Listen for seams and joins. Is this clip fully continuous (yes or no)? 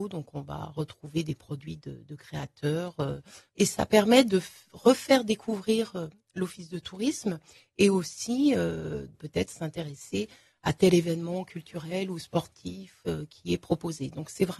no